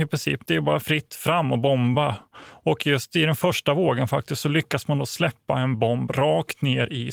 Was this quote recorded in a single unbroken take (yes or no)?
yes